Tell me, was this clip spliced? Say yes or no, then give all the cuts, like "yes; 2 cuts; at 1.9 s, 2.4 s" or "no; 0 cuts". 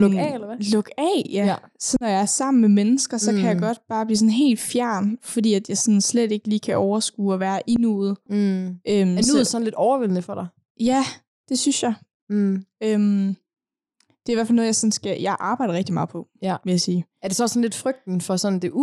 yes; 1 cut; at 8.3 s